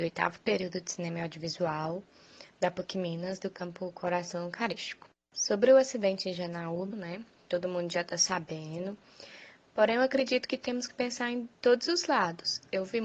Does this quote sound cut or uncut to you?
cut